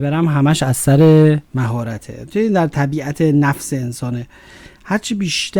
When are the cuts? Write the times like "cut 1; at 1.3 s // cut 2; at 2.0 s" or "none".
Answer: cut 1; at 1.5 s